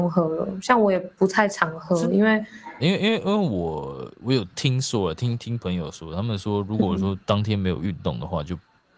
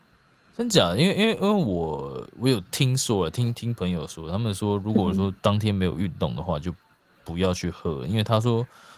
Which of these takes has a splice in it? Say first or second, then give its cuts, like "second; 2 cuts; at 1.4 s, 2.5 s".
first; 1 cut; at 2.8 s